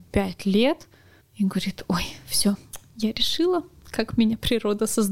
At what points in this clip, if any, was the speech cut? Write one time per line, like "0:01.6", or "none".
none